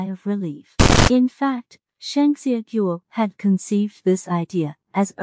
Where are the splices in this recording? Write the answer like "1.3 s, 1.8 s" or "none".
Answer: 1.1 s